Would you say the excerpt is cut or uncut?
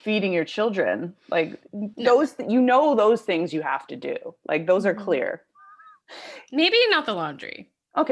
uncut